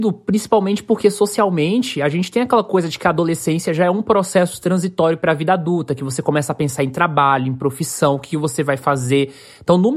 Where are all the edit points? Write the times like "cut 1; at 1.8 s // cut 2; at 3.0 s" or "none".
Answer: none